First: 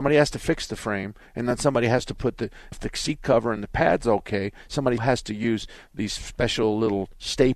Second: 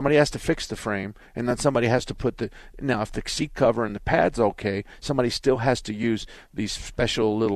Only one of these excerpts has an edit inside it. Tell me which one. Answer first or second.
first